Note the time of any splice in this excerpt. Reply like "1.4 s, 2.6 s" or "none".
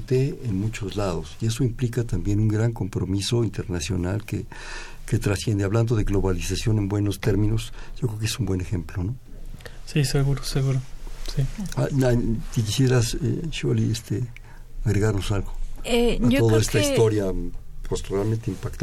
none